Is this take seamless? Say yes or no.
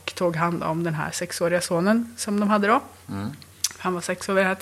yes